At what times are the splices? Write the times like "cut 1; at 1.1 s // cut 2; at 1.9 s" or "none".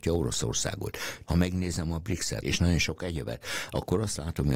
cut 1; at 1.2 s // cut 2; at 2.4 s